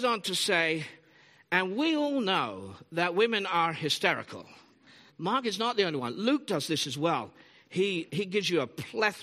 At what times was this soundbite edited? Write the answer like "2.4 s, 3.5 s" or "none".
5.1 s, 8.1 s